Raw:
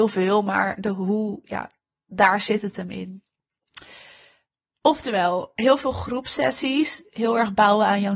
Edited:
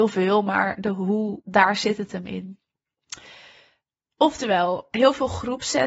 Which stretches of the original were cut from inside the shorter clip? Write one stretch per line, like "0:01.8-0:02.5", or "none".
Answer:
0:01.4-0:02.0